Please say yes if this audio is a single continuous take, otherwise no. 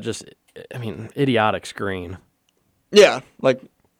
yes